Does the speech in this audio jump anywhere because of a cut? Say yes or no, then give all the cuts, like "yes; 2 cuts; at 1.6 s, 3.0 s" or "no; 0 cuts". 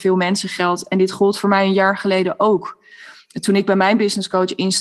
no; 0 cuts